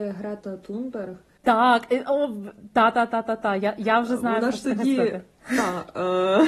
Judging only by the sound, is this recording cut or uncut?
uncut